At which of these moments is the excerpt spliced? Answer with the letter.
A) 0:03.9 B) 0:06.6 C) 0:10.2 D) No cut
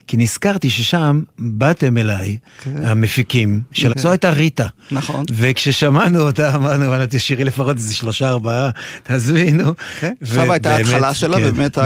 A